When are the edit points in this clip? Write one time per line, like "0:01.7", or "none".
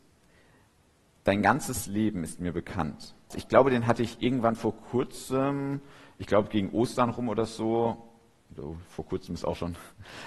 0:03.3